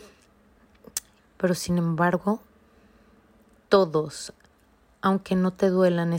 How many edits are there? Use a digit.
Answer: 1